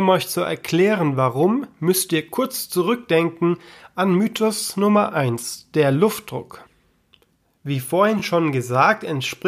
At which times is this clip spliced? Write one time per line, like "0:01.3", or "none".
none